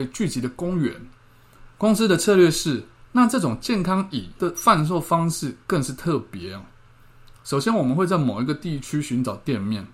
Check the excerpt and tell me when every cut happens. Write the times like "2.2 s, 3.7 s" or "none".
1.7 s, 3.0 s